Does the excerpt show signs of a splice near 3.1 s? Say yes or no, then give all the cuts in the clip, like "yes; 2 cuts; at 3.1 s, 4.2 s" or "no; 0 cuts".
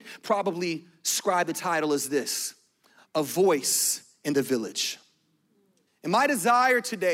no; 1 cut; at 5.9 s